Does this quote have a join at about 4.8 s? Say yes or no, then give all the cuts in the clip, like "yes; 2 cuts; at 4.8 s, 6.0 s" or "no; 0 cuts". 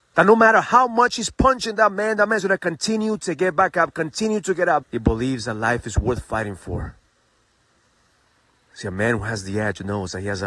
yes; 1 cut; at 4.8 s